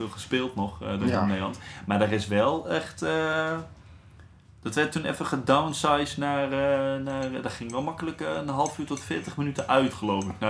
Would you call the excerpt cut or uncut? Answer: uncut